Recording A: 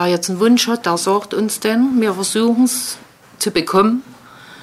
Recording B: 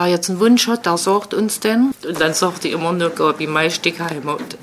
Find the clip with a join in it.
B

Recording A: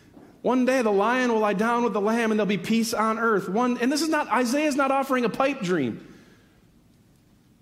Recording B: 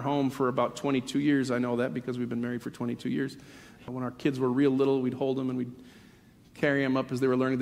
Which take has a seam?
B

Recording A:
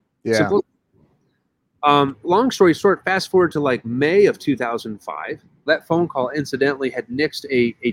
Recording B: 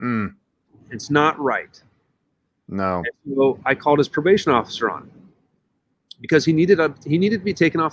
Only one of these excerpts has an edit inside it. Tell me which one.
A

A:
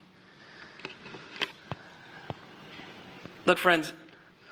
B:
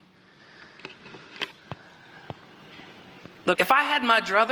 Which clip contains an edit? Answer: B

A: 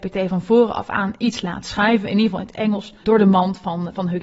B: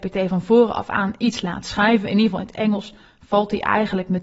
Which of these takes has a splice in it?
A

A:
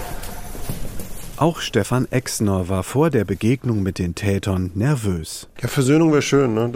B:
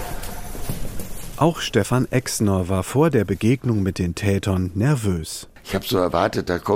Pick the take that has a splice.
A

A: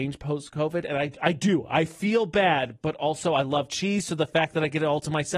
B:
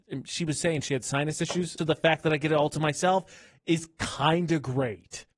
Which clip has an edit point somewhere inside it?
B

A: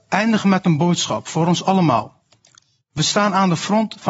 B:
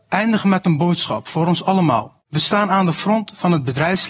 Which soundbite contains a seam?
B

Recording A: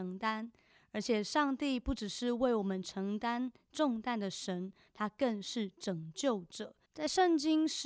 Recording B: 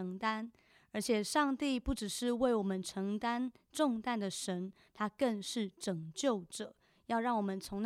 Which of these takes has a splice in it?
A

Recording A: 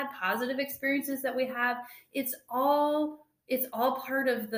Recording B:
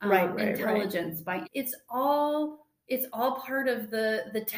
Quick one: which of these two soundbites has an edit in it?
B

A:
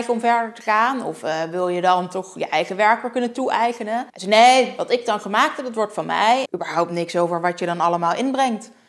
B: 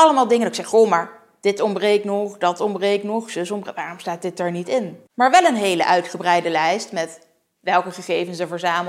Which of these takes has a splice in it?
A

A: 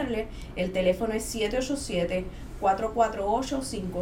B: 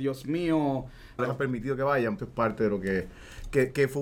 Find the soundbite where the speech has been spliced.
B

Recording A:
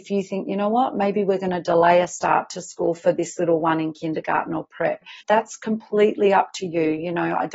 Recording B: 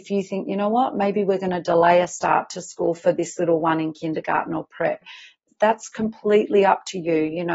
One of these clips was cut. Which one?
A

